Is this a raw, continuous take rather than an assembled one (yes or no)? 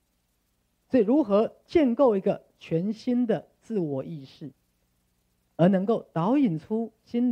yes